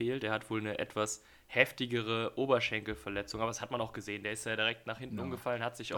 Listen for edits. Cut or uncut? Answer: uncut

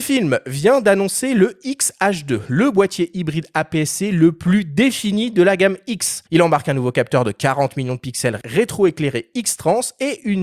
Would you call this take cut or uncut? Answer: cut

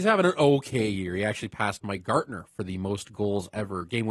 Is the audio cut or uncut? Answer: uncut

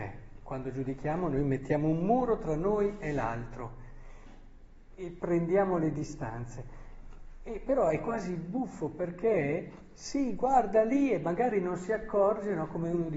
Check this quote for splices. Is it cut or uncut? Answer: uncut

